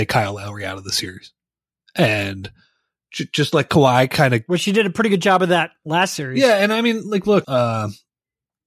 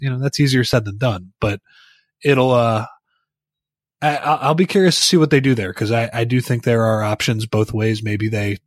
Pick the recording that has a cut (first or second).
first